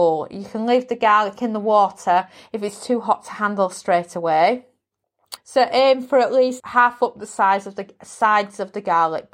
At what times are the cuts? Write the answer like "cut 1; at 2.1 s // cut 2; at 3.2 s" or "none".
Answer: cut 1; at 5.4 s // cut 2; at 6.6 s